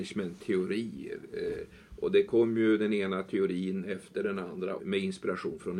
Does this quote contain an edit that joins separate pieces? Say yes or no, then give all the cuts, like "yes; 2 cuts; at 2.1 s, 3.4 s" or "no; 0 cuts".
yes; 1 cut; at 4.8 s